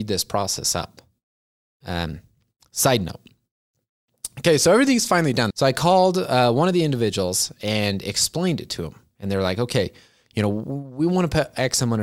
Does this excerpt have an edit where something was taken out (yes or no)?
yes